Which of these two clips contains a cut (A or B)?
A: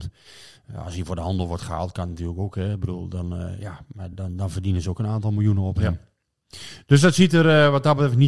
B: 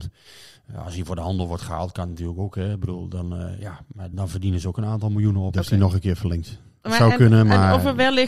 B